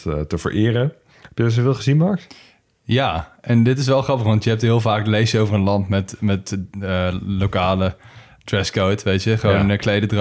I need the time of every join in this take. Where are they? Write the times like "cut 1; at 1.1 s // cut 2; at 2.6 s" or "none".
none